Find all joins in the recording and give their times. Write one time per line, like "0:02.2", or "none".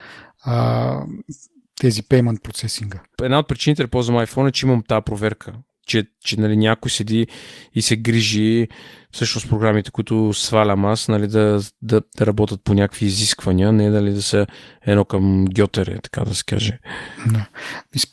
0:03.1

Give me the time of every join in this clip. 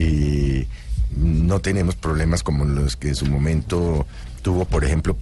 none

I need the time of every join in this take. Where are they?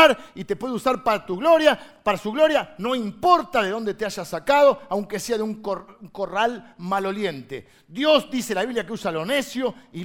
none

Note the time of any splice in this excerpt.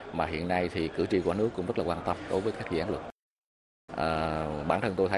0:03.9

